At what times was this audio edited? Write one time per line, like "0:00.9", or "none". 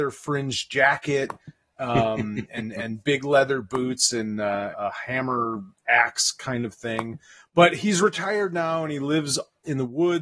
0:04.7

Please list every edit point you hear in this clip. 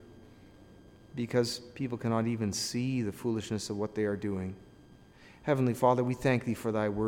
none

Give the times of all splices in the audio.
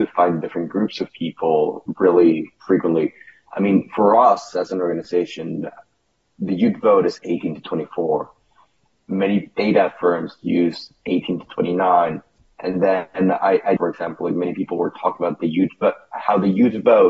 0:13.8

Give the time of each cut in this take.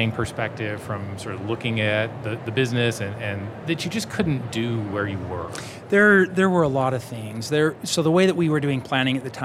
0:03.6

